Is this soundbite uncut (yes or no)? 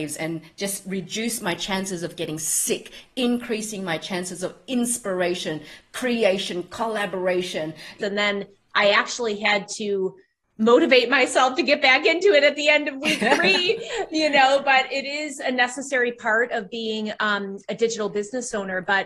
no